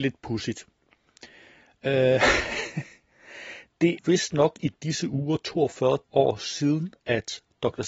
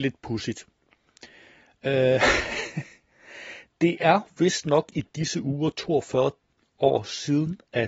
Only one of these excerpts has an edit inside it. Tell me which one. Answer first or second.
first